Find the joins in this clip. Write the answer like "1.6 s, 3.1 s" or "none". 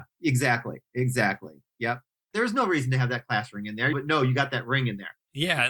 2.3 s, 3.9 s